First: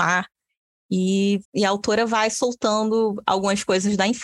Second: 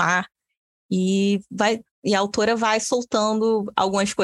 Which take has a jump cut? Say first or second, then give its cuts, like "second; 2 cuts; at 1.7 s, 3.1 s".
first; 1 cut; at 1.5 s